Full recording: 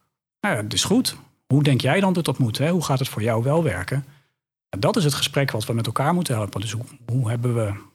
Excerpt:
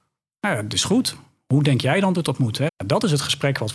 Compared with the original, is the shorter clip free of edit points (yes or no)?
no